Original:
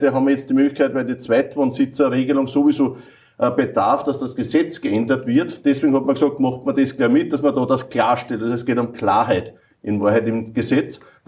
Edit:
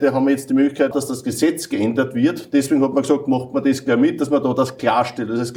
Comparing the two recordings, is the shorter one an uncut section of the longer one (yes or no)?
no